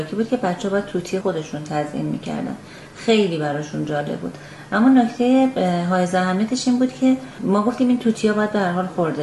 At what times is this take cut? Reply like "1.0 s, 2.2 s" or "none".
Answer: 1.2 s